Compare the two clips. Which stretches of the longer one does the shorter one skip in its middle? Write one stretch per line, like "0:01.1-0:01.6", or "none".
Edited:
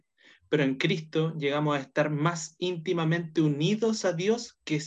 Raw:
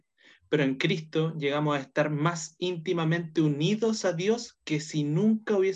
none